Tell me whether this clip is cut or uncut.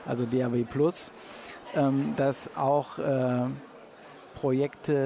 uncut